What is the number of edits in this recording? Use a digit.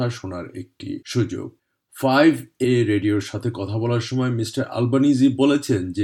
2